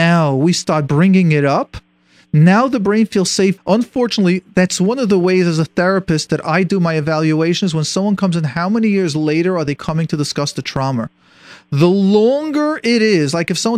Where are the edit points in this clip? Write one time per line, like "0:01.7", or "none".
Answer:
0:03.6